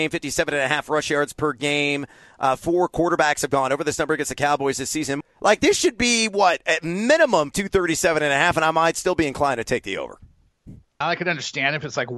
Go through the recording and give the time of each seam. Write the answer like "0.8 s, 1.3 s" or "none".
5.2 s, 7.5 s, 11.0 s

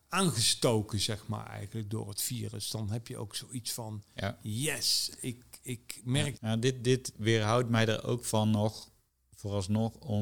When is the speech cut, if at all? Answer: 6.4 s

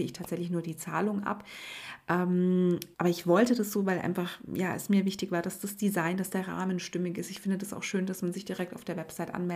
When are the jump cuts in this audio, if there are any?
2.9 s

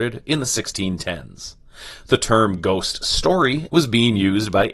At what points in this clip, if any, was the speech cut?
3.7 s

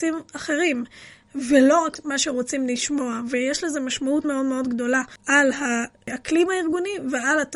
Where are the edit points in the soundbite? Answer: 4.2 s

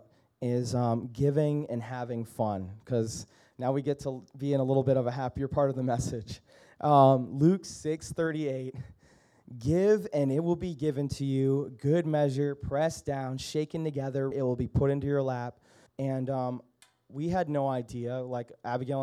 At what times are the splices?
14.3 s, 15.9 s

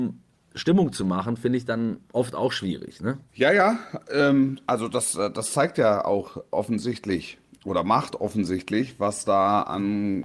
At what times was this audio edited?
3.3 s

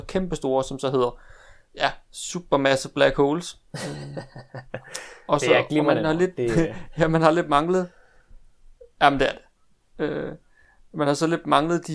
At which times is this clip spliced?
3.6 s

